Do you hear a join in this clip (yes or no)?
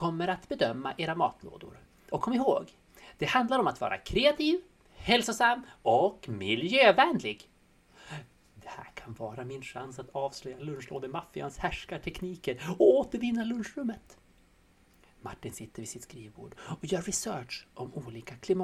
no